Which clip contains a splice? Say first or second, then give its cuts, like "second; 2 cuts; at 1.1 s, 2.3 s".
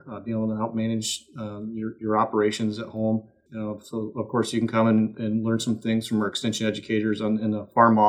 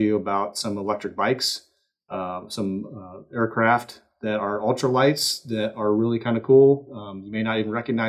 first; 1 cut; at 3.5 s